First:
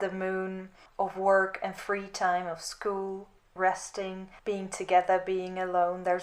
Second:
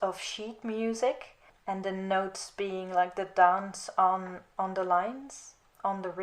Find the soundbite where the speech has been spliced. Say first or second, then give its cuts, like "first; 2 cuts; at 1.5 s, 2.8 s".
first; 1 cut; at 3.6 s